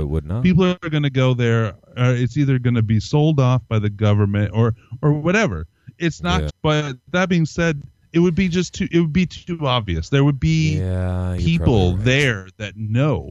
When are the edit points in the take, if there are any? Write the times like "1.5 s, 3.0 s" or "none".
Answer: 6.5 s